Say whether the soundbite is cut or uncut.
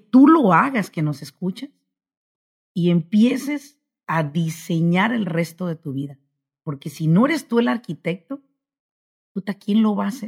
uncut